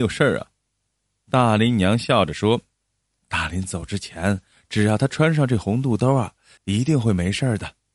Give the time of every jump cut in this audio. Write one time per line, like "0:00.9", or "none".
0:04.5
0:06.6